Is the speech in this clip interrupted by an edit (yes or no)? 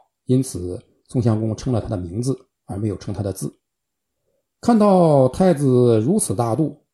no